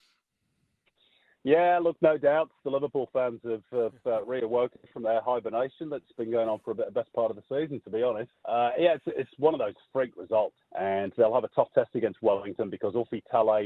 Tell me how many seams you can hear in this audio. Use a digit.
2